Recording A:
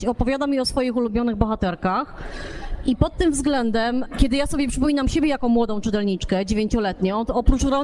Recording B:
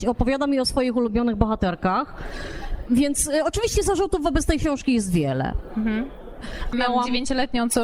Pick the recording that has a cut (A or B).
B